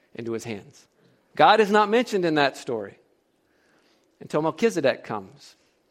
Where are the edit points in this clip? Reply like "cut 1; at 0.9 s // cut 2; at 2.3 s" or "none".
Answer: cut 1; at 1.3 s